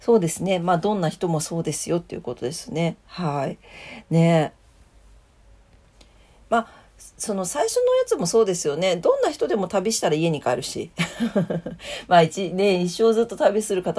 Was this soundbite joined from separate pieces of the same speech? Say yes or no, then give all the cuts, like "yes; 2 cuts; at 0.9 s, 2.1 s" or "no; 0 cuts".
no; 0 cuts